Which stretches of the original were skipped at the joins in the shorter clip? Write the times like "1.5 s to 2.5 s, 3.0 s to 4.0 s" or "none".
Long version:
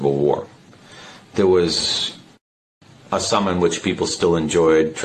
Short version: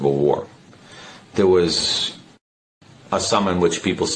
none